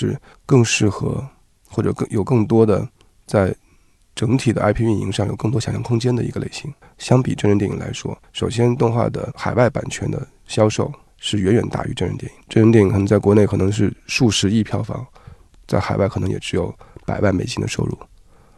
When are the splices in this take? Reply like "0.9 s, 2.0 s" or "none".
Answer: none